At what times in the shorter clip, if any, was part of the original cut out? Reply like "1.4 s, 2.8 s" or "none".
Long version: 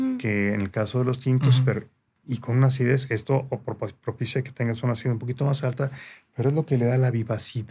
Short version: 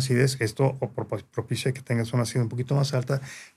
none